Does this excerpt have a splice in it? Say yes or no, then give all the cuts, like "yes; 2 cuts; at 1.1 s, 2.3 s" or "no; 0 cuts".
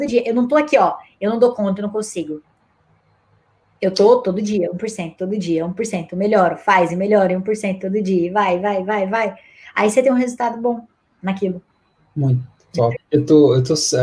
yes; 1 cut; at 13.0 s